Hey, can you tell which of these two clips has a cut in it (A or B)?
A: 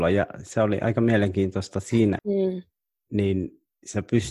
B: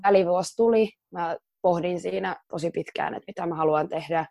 A